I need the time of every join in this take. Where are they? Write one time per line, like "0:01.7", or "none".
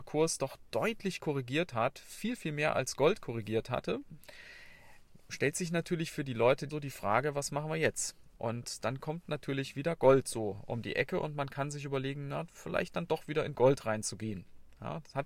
0:06.7